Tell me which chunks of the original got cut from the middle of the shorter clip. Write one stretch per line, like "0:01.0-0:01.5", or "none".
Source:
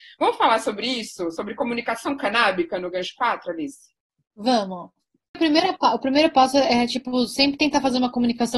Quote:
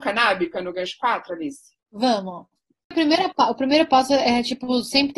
0:04.0-0:04.2